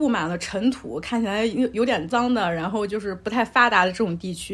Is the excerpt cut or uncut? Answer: cut